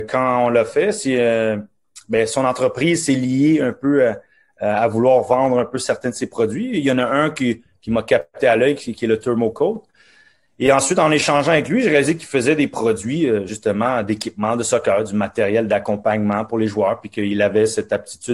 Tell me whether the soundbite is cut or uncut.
uncut